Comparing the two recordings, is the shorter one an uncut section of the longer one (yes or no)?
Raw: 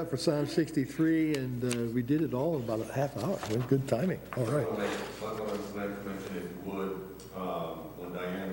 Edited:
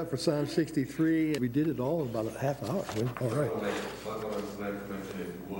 no